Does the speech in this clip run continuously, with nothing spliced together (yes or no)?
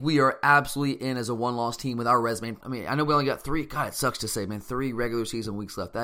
no